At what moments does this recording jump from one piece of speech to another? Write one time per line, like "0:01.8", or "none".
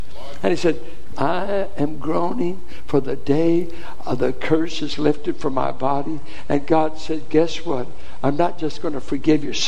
0:01.1